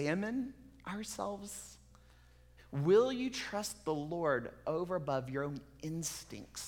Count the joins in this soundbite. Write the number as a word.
one